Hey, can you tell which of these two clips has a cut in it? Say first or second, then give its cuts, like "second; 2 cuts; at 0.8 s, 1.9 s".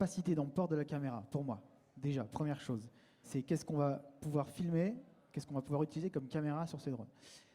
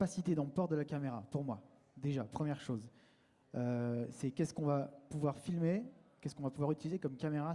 first; 1 cut; at 3.2 s